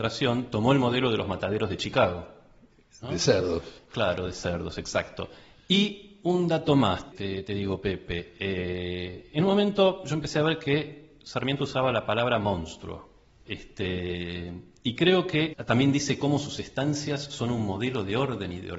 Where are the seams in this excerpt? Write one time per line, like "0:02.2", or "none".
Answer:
0:07.1
0:13.5
0:15.5